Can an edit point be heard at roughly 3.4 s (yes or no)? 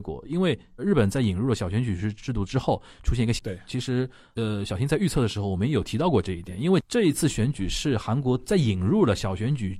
yes